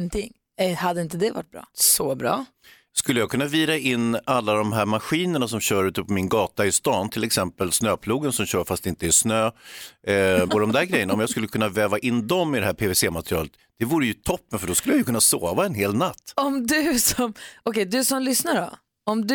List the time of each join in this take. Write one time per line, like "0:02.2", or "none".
0:10.5